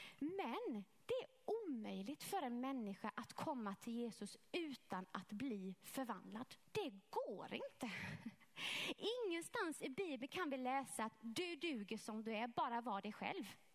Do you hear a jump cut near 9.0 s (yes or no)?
no